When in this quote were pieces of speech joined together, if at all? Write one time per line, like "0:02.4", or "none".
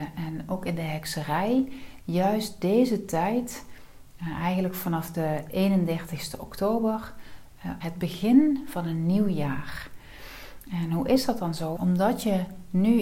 0:07.8
0:11.8